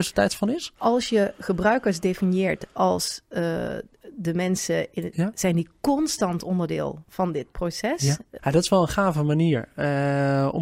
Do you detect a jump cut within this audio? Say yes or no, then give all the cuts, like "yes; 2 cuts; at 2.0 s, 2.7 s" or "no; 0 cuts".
yes; 2 cuts; at 5.1 s, 8.4 s